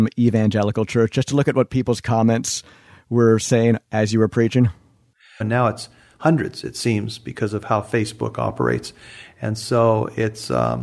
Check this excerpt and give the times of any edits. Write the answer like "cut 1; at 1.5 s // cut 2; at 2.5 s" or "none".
cut 1; at 5.4 s